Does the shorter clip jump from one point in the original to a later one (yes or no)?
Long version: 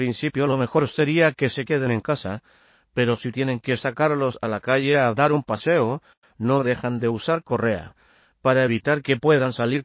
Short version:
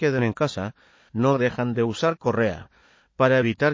yes